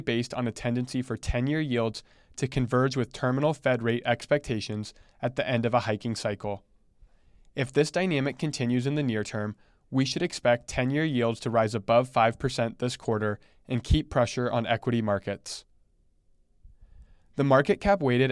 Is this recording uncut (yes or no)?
yes